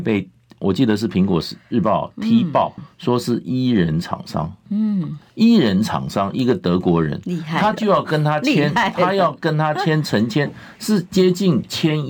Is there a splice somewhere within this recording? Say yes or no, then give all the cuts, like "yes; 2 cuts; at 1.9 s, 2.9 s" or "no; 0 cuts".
yes; 1 cut; at 2.8 s